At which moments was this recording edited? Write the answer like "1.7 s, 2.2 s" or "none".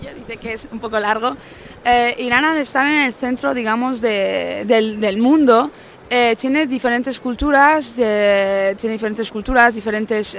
none

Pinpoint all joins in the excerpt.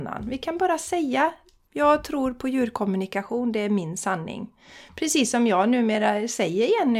1.7 s

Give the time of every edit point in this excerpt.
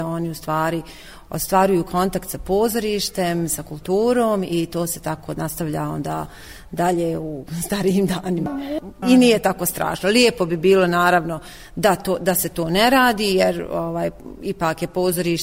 9.0 s

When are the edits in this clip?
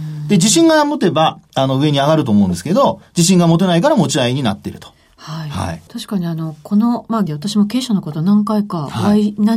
5.9 s, 7.3 s

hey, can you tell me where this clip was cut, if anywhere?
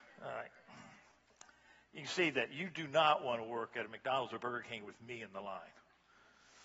none

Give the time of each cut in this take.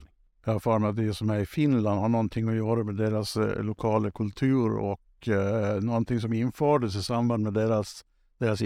none

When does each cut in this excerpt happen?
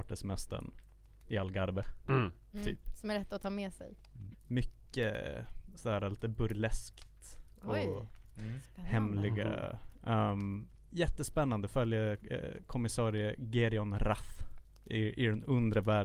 4.3 s, 10.0 s

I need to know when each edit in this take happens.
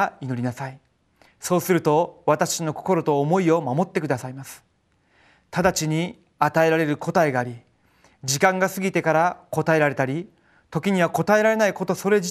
none

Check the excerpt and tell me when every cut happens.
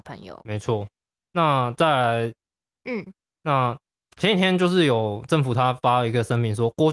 2.8 s

